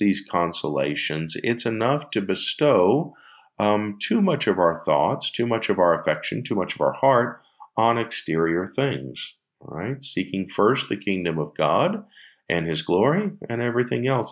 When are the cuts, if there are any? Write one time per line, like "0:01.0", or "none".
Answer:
none

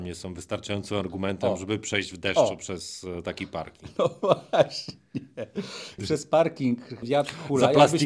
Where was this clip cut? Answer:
0:06.0
0:07.0

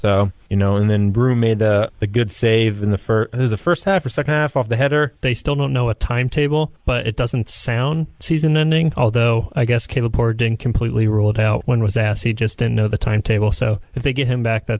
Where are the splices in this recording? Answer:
0:05.2
0:11.6

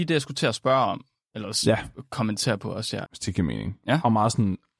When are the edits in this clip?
0:03.1

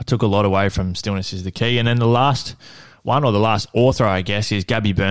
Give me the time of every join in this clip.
none

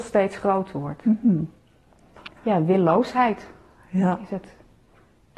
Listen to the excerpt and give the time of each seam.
0:02.4

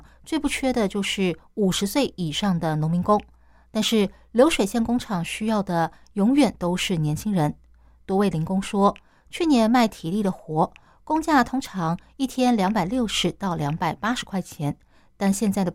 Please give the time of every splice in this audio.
none

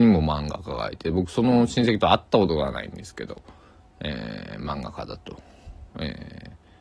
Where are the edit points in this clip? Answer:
none

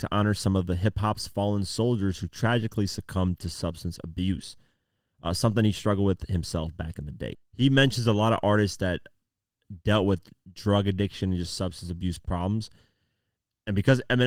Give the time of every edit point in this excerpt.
0:07.3

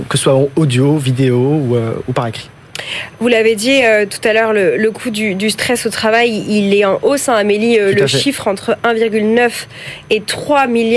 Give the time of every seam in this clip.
none

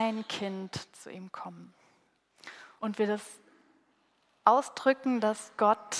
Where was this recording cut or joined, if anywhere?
0:02.8

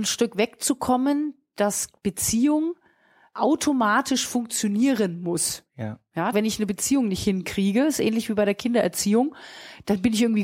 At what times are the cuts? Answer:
0:06.3

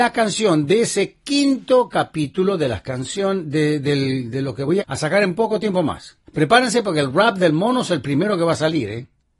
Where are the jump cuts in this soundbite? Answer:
0:04.8
0:06.3

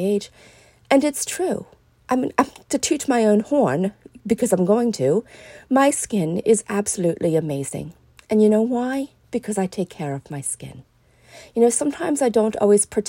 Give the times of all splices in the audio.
none

